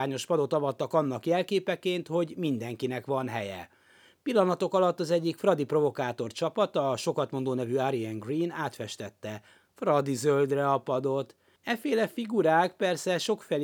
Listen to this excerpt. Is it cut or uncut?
cut